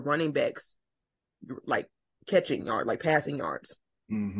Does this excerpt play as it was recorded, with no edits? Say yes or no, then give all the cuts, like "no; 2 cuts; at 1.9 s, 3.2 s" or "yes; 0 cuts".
yes; 0 cuts